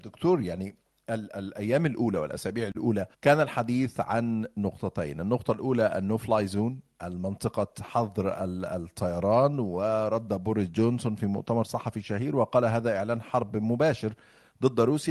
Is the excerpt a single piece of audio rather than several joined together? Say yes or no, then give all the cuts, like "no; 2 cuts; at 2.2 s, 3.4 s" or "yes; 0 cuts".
no; 1 cut; at 3.1 s